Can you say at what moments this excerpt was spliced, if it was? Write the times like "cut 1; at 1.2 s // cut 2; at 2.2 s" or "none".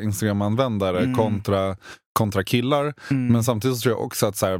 none